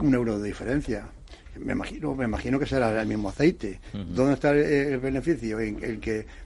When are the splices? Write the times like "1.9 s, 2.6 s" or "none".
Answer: none